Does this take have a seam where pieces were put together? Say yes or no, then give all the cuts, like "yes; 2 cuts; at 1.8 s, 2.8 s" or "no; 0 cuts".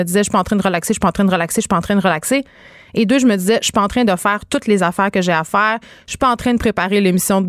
no; 0 cuts